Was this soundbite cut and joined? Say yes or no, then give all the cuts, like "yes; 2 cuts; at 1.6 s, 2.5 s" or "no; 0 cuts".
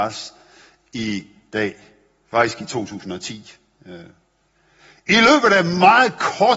no; 0 cuts